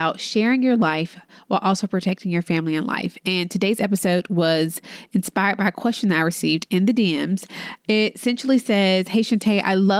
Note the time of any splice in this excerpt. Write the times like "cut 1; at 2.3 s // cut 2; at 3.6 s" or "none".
none